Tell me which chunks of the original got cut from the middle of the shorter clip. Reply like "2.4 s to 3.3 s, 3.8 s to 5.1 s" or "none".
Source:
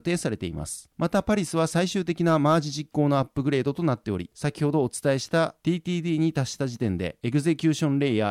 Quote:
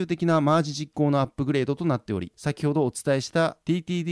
none